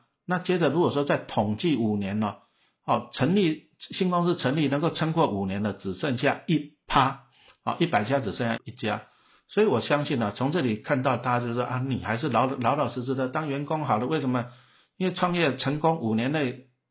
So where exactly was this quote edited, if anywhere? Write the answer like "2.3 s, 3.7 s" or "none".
8.6 s